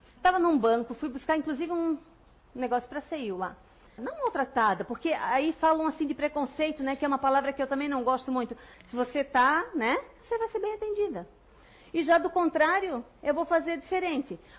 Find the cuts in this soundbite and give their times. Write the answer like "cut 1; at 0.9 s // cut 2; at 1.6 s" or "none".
cut 1; at 4.0 s // cut 2; at 8.7 s // cut 3; at 10.2 s